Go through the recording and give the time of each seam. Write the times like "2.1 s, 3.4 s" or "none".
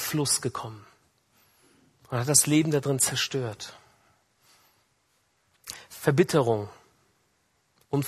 none

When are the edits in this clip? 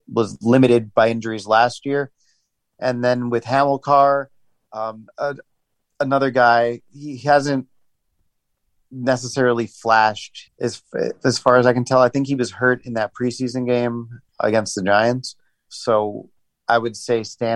10.4 s, 15.7 s

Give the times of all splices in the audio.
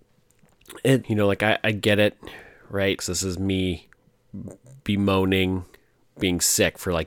1.0 s, 3.0 s

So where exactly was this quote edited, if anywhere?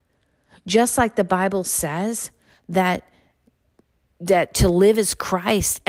none

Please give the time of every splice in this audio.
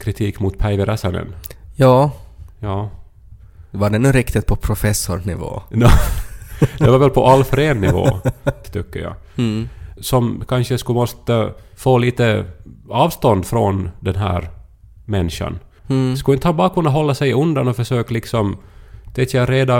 8.6 s, 10.0 s, 15.8 s

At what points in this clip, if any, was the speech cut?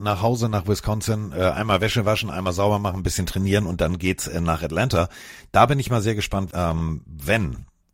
6.5 s

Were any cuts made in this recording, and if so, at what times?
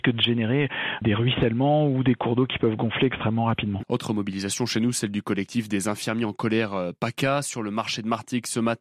3.8 s

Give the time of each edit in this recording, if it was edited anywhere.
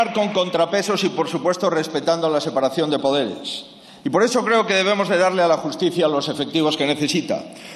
none

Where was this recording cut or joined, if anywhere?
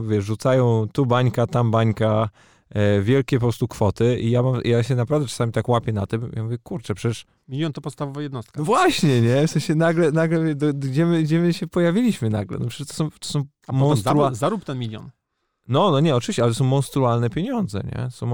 none

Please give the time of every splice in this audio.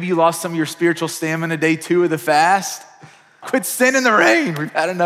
3.4 s

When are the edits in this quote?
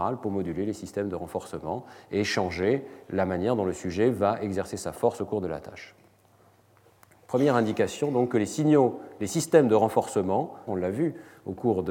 10.7 s

